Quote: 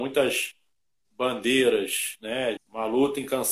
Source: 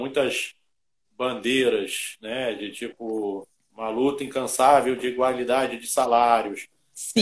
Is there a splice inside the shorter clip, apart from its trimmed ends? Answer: yes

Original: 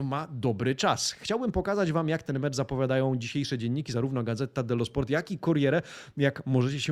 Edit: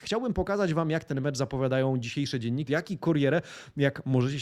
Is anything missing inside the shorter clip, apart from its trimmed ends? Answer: yes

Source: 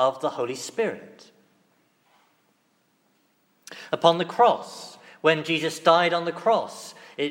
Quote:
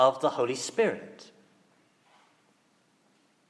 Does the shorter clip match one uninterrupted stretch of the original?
yes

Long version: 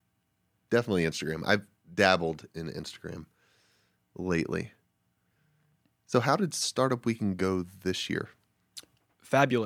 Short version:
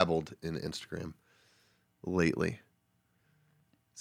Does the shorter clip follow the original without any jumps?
yes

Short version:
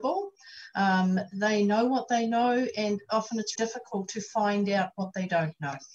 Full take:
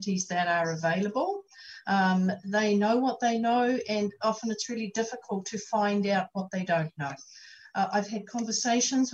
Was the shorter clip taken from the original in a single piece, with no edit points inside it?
no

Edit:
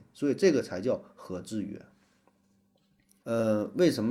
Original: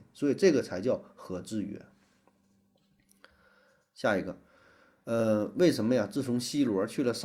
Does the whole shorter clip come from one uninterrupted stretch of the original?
no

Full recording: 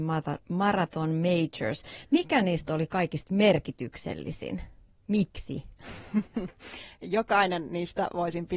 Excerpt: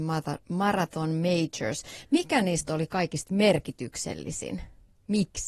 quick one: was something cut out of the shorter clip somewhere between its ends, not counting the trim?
no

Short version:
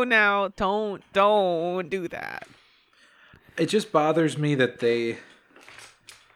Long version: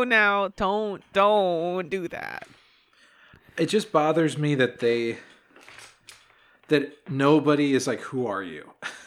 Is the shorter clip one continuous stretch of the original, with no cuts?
yes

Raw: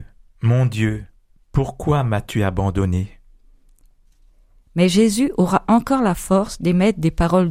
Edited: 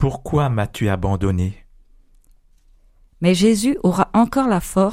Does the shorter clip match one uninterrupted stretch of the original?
yes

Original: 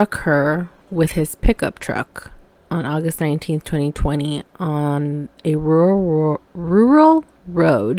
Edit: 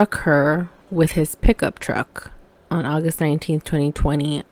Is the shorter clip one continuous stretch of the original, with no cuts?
yes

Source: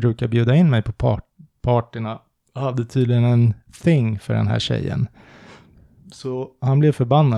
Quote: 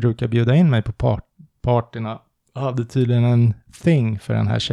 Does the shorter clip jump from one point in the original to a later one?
no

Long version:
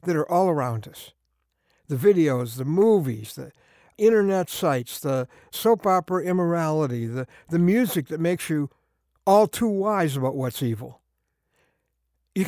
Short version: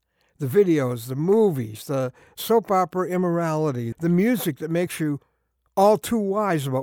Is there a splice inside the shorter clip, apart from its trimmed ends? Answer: yes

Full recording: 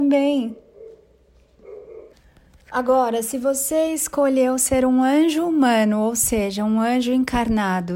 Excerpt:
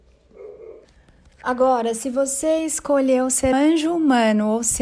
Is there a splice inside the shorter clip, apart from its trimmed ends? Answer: yes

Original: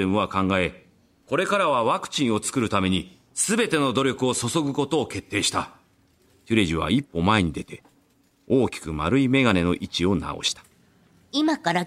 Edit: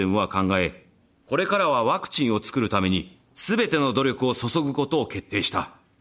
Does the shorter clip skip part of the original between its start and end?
no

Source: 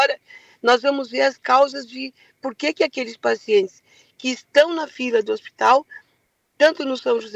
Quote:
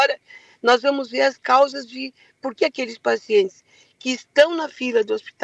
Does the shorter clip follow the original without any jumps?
no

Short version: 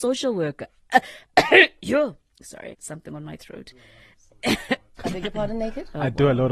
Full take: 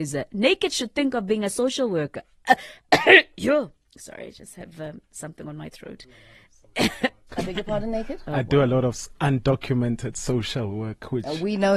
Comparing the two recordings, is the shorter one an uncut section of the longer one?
no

